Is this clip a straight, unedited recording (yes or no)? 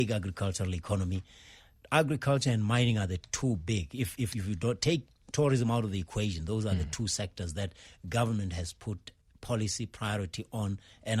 yes